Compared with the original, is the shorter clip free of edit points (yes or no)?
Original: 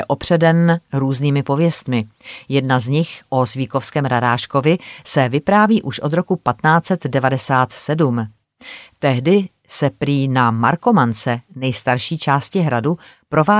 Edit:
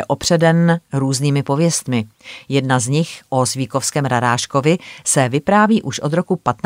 yes